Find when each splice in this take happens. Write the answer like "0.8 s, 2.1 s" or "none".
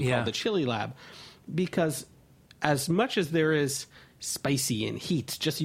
none